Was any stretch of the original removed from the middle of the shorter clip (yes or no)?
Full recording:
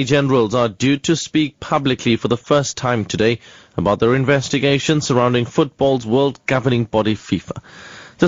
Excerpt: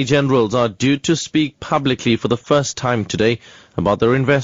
no